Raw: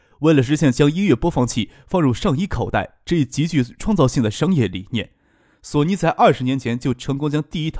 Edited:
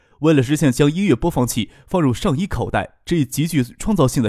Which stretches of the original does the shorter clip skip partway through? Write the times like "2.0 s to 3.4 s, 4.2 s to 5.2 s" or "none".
none